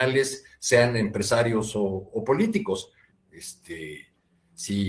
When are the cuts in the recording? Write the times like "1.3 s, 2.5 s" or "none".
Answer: 3.1 s